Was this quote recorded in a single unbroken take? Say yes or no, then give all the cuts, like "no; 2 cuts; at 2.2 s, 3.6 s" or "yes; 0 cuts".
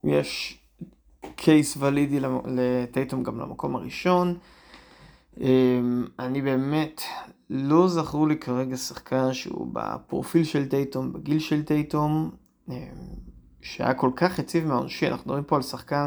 yes; 0 cuts